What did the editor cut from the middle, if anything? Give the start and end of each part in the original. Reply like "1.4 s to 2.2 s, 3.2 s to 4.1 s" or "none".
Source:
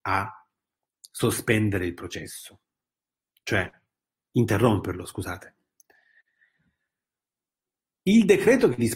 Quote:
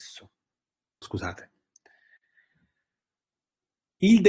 3.3 s to 5.1 s